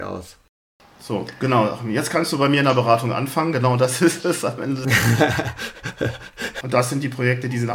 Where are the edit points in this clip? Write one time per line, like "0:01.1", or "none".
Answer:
0:06.6